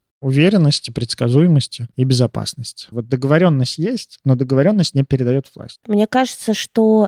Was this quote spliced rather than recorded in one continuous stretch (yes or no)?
yes